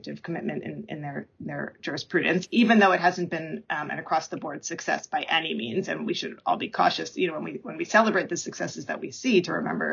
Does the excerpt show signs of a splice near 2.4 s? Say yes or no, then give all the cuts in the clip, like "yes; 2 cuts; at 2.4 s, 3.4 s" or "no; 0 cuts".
yes; 1 cut; at 2.4 s